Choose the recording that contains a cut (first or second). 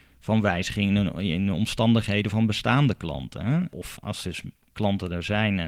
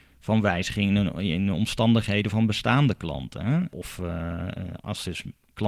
first